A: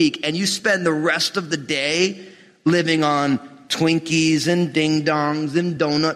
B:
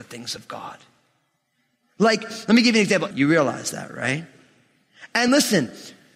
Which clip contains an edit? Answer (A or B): B